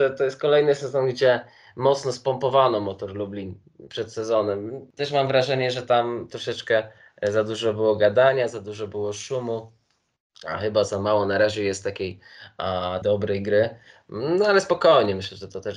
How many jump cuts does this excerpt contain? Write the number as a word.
one